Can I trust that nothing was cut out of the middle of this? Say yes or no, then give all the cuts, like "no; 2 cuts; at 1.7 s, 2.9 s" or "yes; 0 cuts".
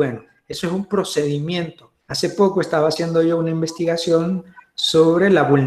no; 1 cut; at 2.0 s